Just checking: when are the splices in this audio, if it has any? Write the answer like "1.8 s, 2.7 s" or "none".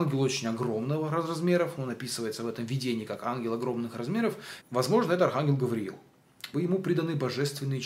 4.6 s, 6.5 s